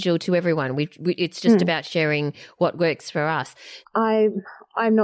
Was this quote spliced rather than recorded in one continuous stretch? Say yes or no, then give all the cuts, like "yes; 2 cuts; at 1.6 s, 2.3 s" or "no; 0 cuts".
yes; 1 cut; at 3.8 s